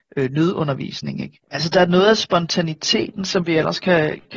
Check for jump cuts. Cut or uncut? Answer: cut